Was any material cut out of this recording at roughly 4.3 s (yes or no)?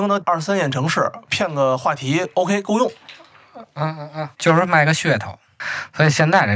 yes